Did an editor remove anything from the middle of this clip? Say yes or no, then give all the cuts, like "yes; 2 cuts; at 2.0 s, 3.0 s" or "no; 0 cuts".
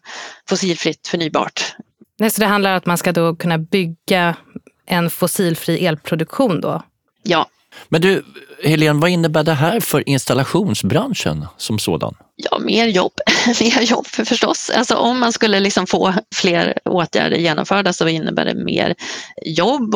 no; 0 cuts